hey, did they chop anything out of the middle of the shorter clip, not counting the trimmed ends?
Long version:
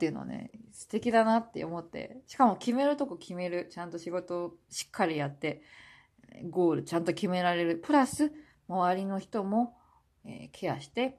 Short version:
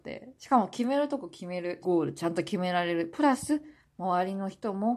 yes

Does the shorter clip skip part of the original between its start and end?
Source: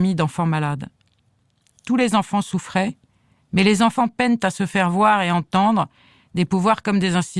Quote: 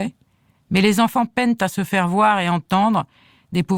no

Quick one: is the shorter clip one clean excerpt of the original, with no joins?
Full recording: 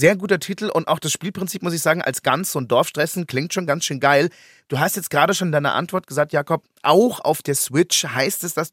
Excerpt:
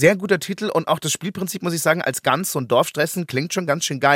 yes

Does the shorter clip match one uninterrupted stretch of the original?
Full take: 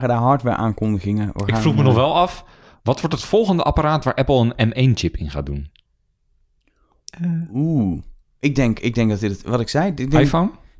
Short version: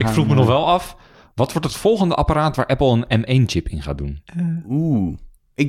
no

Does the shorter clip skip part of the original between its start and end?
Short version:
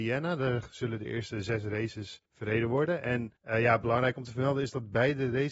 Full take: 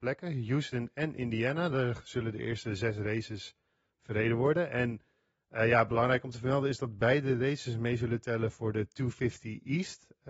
yes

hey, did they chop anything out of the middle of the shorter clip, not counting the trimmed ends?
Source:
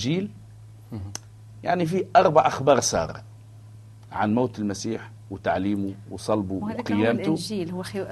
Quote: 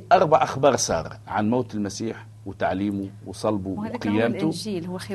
yes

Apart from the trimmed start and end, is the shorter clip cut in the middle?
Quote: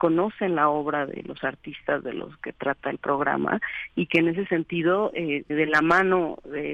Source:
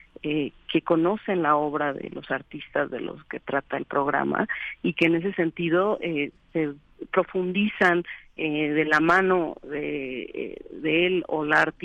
yes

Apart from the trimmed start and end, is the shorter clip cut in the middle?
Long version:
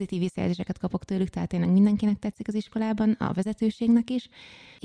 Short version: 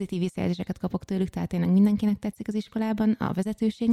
no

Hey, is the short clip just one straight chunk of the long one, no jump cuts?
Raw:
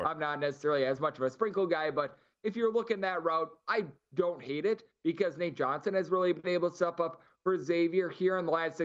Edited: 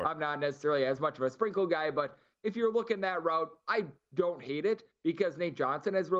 yes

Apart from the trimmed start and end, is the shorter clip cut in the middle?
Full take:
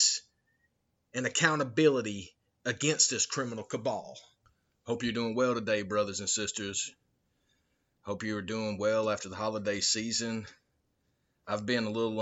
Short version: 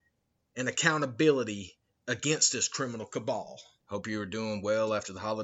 yes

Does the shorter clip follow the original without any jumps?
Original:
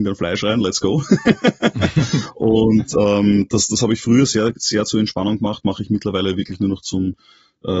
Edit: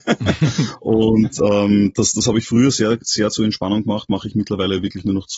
yes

